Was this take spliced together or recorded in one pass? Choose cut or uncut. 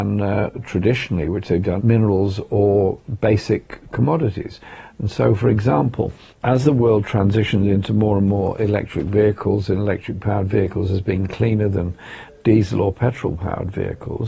cut